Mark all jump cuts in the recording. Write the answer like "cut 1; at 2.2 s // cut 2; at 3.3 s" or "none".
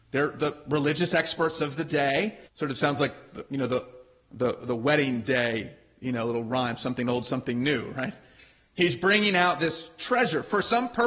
cut 1; at 2.5 s